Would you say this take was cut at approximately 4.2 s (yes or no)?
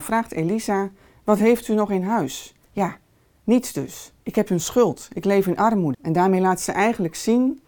yes